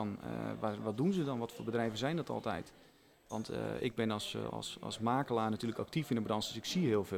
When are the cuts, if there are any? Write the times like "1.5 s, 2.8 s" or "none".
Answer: 4.5 s